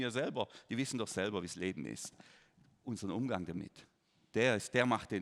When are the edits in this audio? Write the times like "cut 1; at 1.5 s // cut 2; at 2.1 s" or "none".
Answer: none